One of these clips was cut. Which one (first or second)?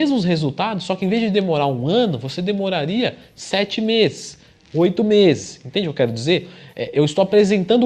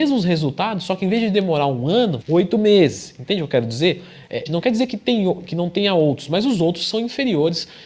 second